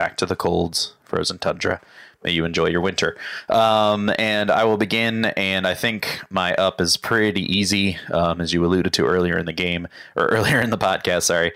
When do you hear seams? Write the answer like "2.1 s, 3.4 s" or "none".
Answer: none